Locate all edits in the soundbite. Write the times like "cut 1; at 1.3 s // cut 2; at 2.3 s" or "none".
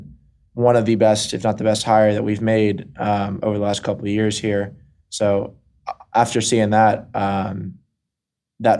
none